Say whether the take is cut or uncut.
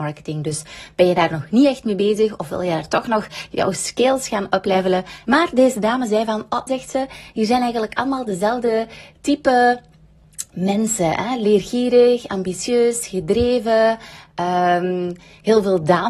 cut